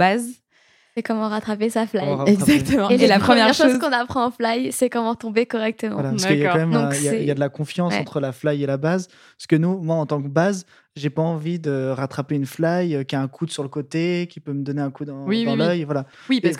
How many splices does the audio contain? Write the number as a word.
zero